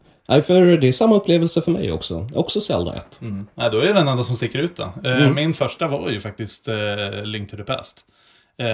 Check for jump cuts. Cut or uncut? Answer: uncut